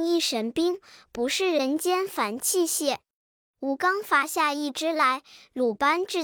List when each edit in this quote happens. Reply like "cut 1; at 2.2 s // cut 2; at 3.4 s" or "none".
cut 1; at 3.5 s